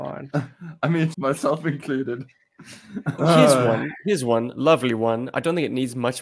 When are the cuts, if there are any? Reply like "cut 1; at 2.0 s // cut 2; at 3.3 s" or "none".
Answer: cut 1; at 1.1 s // cut 2; at 3.2 s